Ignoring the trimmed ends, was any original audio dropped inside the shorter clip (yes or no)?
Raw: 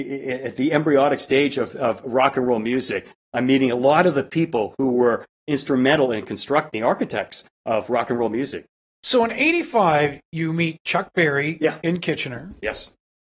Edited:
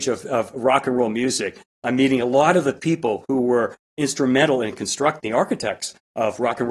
no